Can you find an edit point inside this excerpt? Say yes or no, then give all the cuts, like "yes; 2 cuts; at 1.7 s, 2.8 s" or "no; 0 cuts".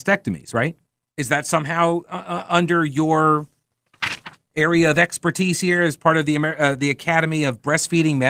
yes; 1 cut; at 1.1 s